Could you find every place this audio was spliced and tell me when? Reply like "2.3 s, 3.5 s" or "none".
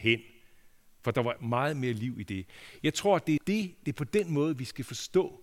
3.4 s